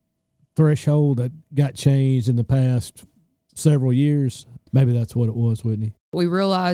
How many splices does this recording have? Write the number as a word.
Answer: one